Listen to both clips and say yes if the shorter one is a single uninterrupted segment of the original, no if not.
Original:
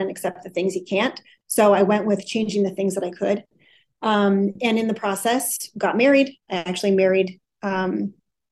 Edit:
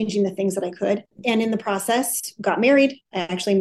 no